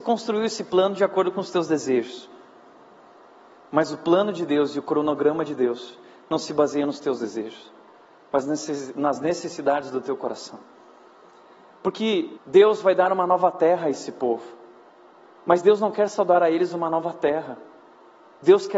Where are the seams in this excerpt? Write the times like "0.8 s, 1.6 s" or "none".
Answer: 12.4 s